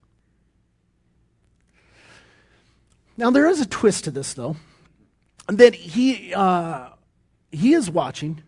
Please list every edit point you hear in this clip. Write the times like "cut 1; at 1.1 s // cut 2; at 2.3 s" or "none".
none

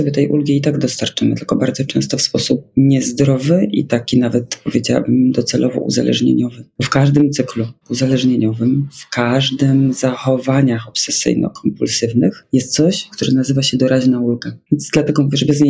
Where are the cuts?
cut 1; at 13.1 s // cut 2; at 14.7 s

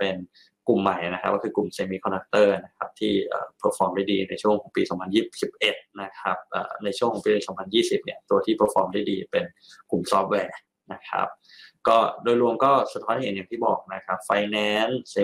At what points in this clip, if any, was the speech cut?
none

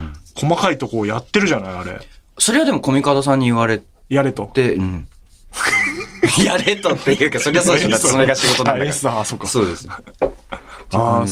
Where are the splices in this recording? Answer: none

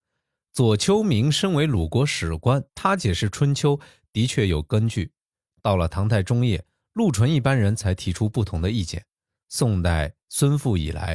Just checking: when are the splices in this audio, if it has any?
cut 1; at 2.7 s

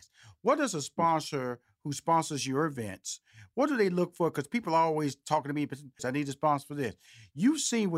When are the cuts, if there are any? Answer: cut 1; at 6.0 s

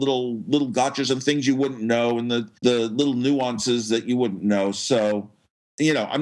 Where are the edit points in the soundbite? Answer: cut 1; at 2.6 s

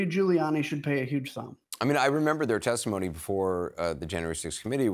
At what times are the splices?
none

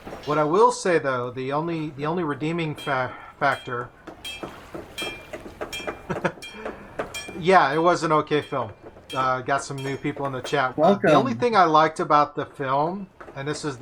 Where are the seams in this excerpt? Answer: cut 1; at 10.7 s

